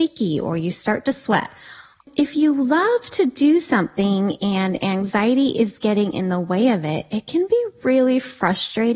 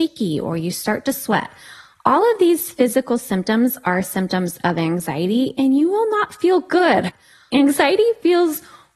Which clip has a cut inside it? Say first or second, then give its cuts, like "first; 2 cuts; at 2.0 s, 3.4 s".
first; 1 cut; at 2.0 s